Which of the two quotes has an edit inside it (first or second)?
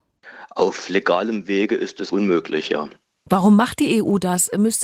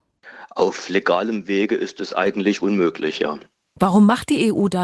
first